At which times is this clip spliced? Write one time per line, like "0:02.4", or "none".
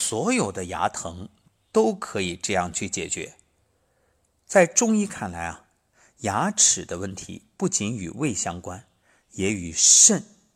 none